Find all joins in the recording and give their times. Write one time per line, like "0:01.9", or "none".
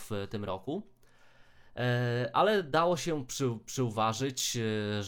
none